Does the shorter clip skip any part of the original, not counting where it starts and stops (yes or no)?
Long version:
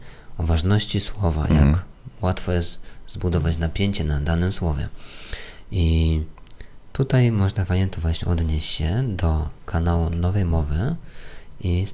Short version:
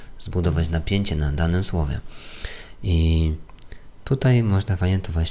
no